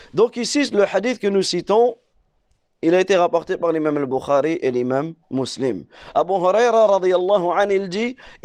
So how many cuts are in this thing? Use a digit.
1